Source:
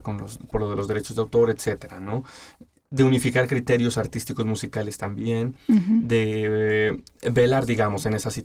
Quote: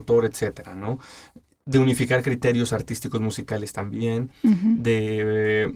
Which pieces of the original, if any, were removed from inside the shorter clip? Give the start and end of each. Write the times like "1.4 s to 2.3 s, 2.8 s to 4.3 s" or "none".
none